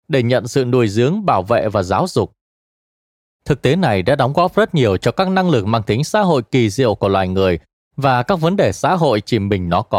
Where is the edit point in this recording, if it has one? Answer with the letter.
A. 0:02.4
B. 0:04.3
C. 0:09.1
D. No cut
D